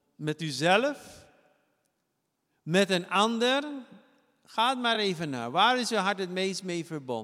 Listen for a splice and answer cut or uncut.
uncut